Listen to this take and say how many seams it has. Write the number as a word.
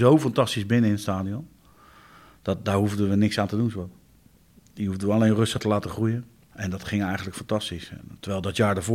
one